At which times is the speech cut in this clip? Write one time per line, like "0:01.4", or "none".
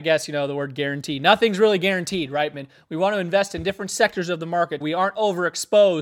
0:02.5
0:04.8